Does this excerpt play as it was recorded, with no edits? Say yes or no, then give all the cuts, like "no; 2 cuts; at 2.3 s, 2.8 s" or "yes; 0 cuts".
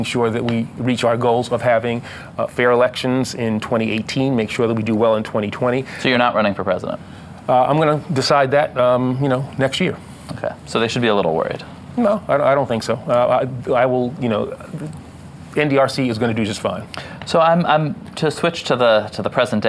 yes; 0 cuts